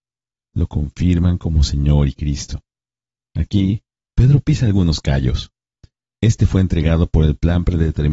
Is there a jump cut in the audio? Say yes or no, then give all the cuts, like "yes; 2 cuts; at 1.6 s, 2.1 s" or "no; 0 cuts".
yes; 1 cut; at 3.2 s